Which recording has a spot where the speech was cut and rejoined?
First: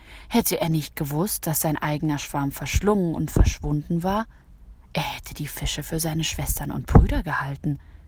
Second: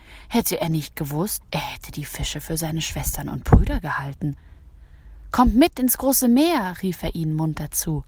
second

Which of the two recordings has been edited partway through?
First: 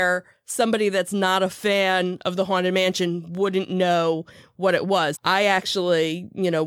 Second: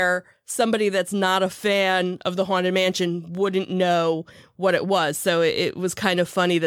first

